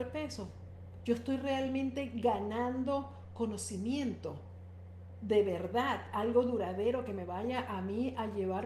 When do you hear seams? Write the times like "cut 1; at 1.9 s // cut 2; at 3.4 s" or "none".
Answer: cut 1; at 1.0 s

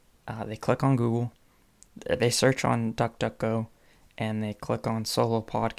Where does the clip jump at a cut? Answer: none

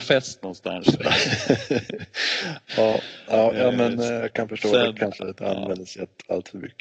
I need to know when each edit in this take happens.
none

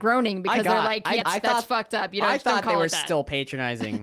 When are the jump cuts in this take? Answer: cut 1; at 1.2 s

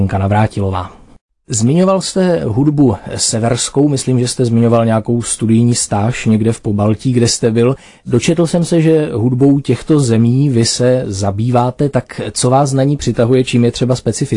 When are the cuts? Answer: none

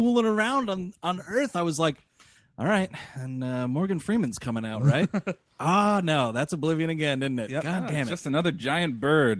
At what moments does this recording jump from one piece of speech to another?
none

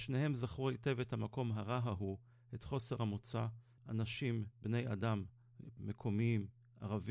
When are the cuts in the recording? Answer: cut 1; at 3.8 s // cut 2; at 5.8 s

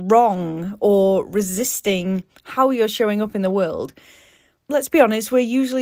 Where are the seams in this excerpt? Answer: cut 1; at 4.6 s

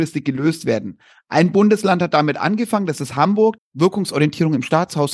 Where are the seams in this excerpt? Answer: cut 1; at 3.6 s

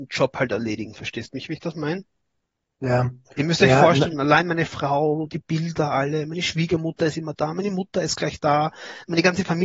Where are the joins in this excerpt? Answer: none

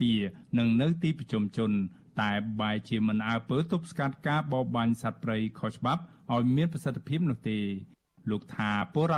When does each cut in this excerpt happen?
none

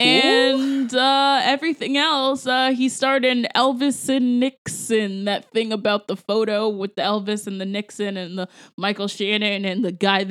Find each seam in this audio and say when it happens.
none

